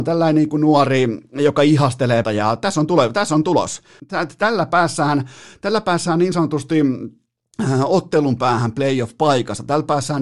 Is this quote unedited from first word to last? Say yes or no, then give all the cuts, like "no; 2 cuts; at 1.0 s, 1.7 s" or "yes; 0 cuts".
no; 2 cuts; at 2.2 s, 4.0 s